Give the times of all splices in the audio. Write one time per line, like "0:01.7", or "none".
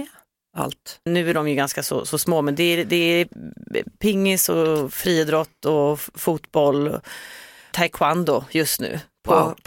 0:01.1